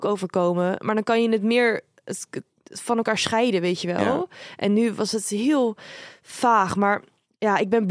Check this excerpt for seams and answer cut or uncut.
uncut